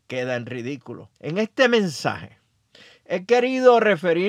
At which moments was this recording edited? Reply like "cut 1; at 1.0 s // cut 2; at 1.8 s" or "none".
cut 1; at 1.2 s